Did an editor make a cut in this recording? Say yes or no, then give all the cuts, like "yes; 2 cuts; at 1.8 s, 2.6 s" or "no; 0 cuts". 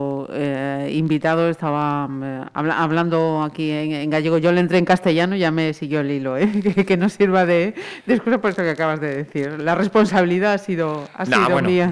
no; 0 cuts